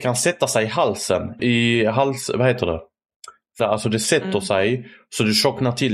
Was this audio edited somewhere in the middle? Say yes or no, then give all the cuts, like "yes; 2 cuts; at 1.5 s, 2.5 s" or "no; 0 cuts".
yes; 2 cuts; at 1.4 s, 3.6 s